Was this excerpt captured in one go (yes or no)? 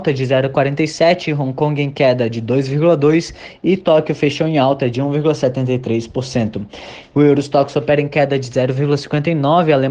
no